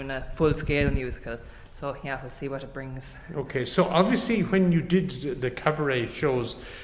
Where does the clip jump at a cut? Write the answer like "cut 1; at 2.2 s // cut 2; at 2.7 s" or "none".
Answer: none